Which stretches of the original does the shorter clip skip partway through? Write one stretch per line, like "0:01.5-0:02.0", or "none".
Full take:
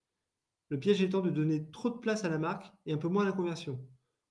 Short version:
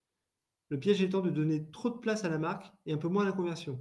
none